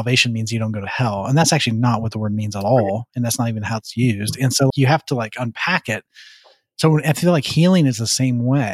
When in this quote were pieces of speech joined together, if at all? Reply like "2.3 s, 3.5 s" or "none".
4.7 s